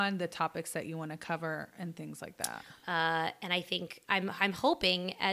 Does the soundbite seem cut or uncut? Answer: cut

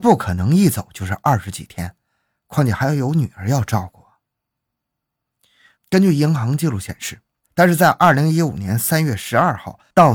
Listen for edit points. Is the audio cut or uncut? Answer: cut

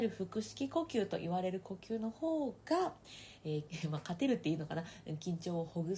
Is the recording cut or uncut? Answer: cut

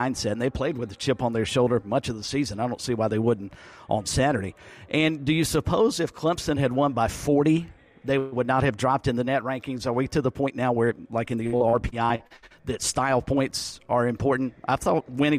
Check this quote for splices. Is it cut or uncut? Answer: uncut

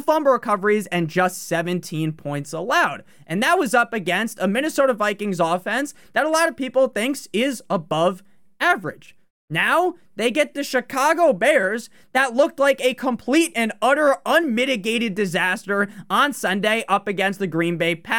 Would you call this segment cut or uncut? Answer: uncut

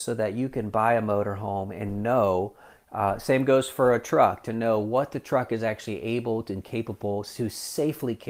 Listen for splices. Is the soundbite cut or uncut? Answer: uncut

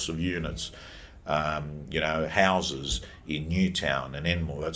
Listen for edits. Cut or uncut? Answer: uncut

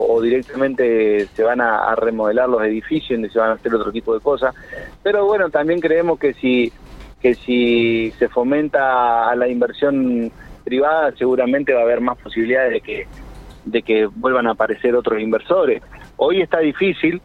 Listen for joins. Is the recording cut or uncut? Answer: uncut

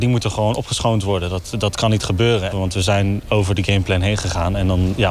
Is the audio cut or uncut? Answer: cut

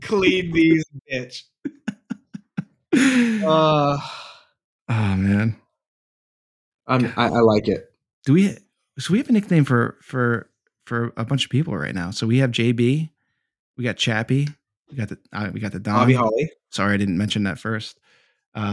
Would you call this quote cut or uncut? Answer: uncut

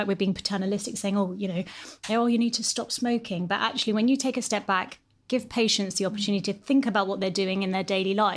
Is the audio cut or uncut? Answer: cut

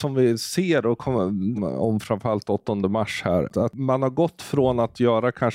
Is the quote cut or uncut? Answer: cut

